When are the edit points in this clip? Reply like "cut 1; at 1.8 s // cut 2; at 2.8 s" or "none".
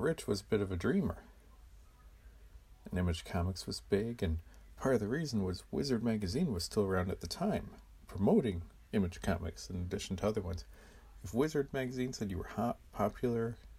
none